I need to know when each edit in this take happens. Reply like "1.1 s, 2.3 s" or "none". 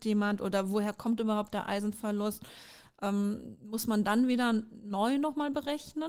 none